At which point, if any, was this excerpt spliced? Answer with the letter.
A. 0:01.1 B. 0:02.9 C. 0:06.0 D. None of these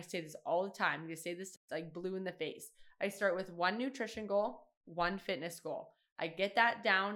D